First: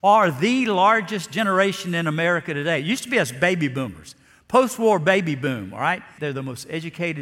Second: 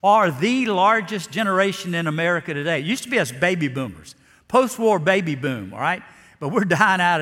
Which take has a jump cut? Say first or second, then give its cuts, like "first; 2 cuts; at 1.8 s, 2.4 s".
first; 1 cut; at 6.2 s